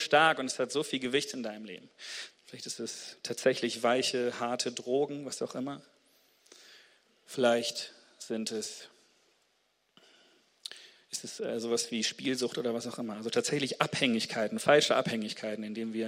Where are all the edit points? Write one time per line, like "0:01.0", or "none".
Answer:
0:02.3